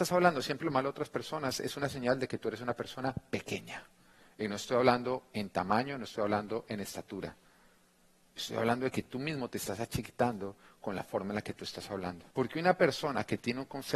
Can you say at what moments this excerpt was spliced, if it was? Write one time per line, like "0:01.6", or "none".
0:12.3